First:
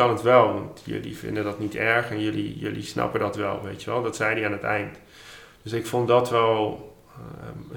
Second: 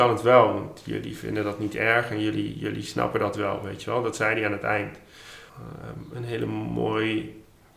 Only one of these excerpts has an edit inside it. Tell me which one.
second; 1 cut; at 5.5 s

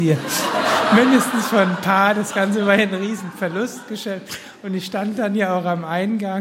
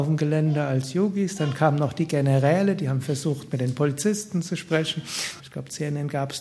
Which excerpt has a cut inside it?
second; 1 cut; at 5.4 s

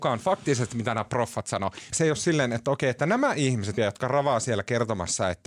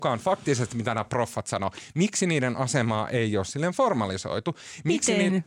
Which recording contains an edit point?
first; 2 cuts; at 1.9 s, 3.8 s

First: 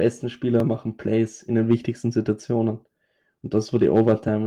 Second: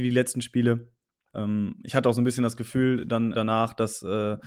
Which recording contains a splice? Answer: second; 2 cuts; at 1.3 s, 3.3 s

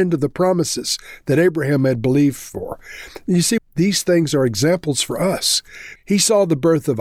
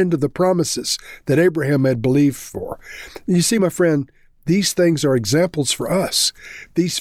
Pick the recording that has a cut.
first; 2 cuts; at 3.6 s, 6.0 s

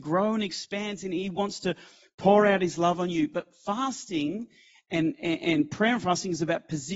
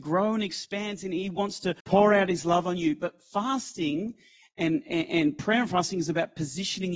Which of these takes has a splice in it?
second; 1 cut; at 1.8 s

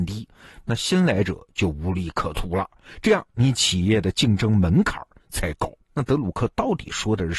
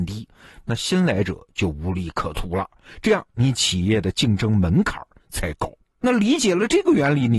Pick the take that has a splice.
first; 1 cut; at 5.9 s

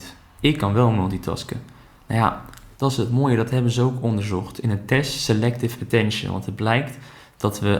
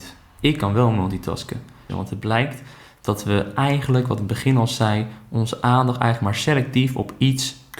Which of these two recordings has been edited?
second; 1 cut; at 1.9 s

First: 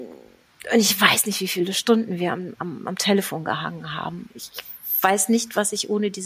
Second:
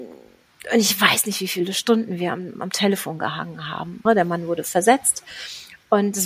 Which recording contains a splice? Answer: second; 2 cuts; at 2.6 s, 4.1 s

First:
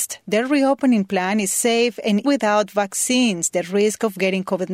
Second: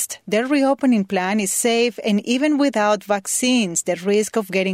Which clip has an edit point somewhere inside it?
first; 1 cut; at 2.2 s

